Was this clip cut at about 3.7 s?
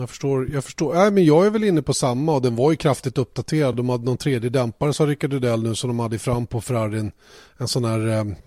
no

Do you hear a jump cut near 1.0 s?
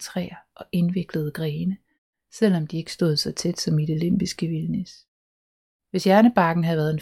no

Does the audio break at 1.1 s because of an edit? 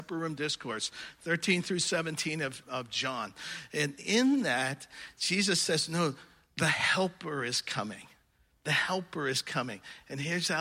no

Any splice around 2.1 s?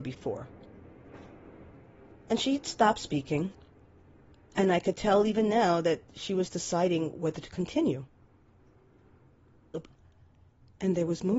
no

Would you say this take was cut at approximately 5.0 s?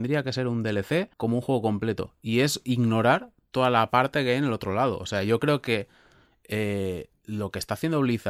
no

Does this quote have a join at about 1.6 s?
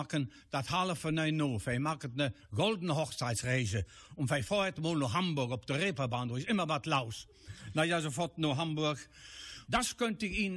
no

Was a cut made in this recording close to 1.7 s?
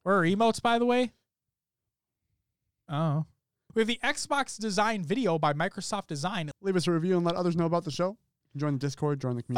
no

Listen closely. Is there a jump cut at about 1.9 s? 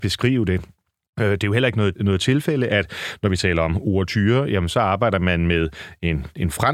yes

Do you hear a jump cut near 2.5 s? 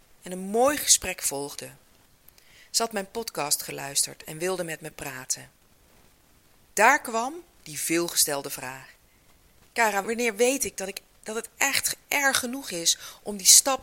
no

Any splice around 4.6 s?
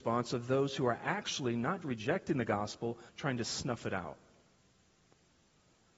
no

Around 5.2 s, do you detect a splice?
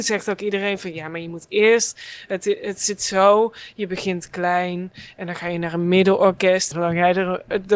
no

